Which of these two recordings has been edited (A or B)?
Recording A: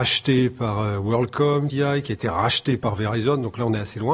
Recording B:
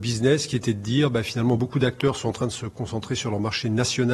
A